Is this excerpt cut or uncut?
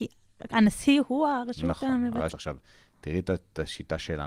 cut